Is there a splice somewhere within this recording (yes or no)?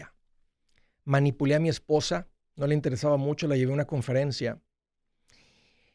no